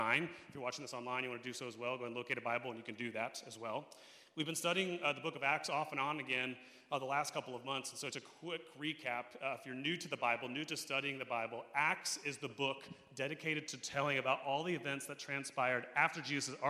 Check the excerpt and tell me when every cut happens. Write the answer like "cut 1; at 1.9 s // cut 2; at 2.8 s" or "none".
cut 1; at 8.1 s